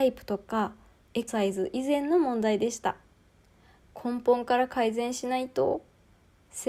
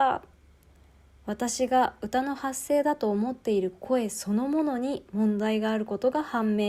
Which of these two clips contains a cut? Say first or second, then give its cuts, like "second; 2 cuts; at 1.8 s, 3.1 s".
first; 1 cut; at 1.3 s